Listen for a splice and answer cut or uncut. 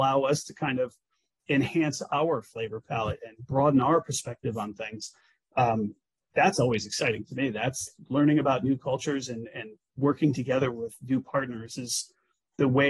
uncut